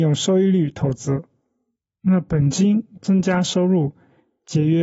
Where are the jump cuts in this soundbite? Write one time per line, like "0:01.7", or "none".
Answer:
0:01.9
0:03.0